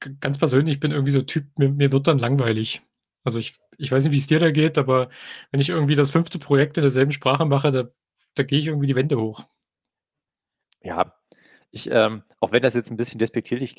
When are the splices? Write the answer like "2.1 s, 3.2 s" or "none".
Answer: none